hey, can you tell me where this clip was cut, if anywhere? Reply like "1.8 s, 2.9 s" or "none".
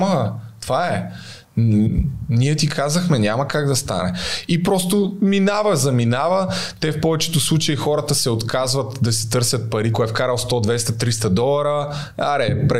9.9 s